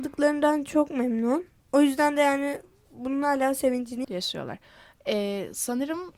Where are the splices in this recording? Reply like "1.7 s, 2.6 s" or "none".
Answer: 1.6 s, 4.0 s